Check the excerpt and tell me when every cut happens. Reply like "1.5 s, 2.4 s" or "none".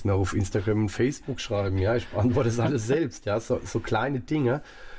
none